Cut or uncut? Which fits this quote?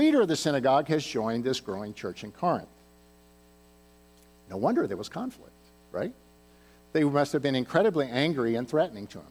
uncut